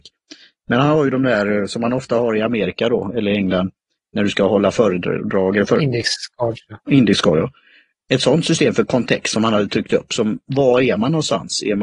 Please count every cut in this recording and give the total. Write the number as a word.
zero